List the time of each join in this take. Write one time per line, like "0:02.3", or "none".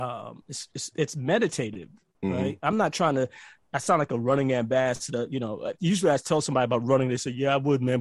none